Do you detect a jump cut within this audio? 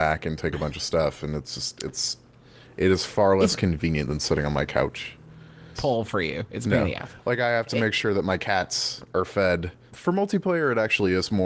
yes; 2 cuts; at 5.7 s, 9.9 s

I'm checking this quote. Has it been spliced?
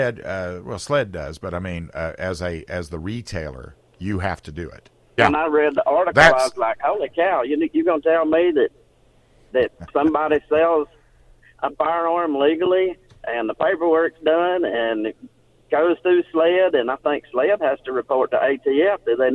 yes; 1 cut; at 5.2 s

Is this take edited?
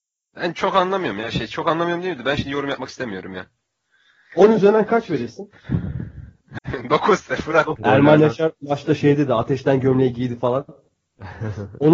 yes; 2 cuts; at 6.6 s, 7.8 s

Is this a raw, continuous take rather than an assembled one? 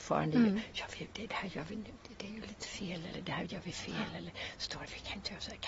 yes; 0 cuts

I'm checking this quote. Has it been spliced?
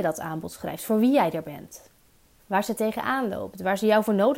yes; 1 cut; at 2.4 s

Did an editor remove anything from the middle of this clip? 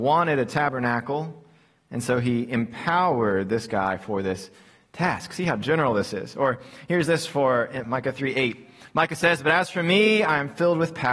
yes; 1 cut; at 7.8 s

